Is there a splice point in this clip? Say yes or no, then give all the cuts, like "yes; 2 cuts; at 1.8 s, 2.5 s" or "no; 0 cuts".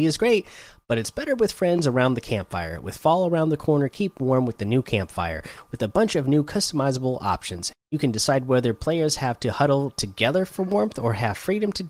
yes; 1 cut; at 7.7 s